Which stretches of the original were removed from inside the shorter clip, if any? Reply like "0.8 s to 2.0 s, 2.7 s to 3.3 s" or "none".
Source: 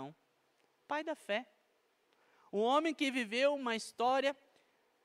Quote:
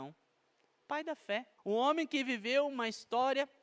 1.6 s to 2.5 s